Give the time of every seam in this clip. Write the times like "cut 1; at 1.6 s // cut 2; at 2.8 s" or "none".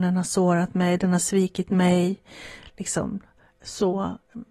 none